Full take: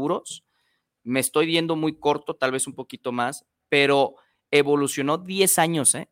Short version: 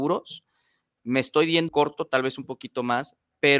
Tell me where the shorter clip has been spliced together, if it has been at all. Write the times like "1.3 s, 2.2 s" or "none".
1.7 s